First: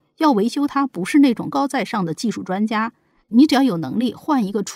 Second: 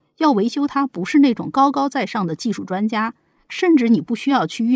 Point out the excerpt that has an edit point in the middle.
first; 2 cuts; at 1.5 s, 3.2 s

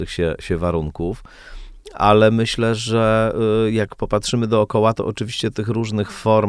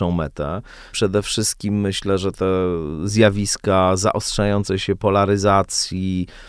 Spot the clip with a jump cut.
second; 1 cut; at 0.9 s

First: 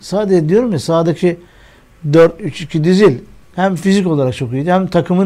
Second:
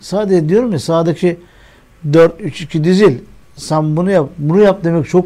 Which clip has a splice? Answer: first; 1 cut; at 3.5 s

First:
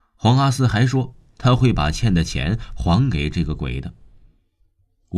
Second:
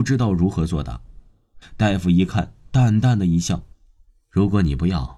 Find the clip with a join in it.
second; 2 cuts; at 1.6 s, 3.7 s

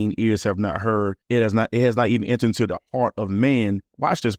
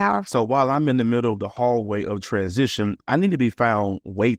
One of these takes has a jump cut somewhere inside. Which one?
first; 1 cut; at 1.2 s

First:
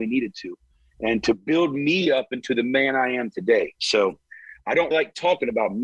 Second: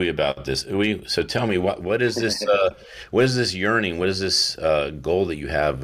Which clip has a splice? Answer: first; 1 cut; at 4.9 s

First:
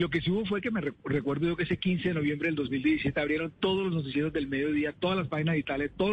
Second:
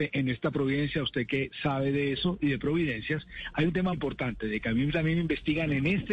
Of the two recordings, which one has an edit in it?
second; 1 cut; at 3.9 s

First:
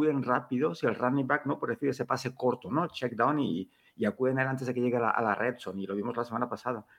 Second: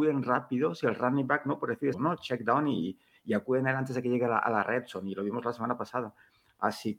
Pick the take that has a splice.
second; 1 cut; at 1.9 s

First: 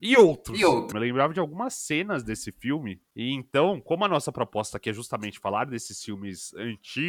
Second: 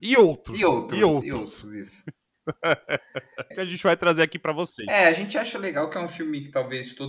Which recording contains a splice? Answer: first; 1 cut; at 0.9 s

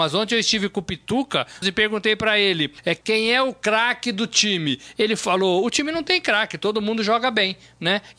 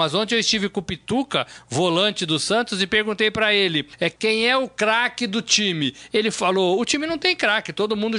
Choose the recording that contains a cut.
first; 1 cut; at 1.6 s

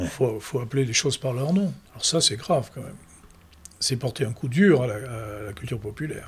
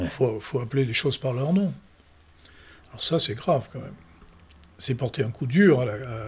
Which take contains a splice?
first; 1 cut; at 1.9 s

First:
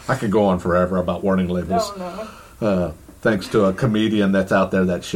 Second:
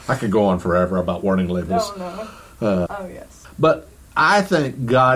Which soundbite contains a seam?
second; 1 cut; at 2.9 s

